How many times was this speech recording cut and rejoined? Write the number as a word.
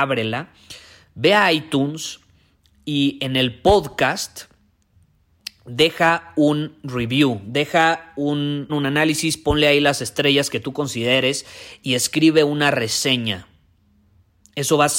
one